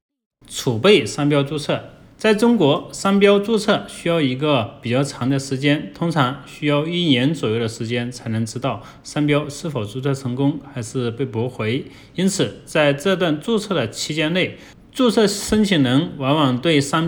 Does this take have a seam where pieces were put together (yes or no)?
no